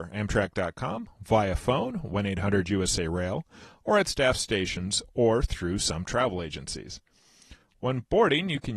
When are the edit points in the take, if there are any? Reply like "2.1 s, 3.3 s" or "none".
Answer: none